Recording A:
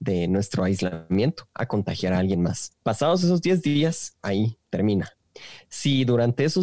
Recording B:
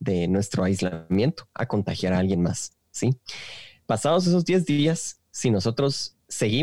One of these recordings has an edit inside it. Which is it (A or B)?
A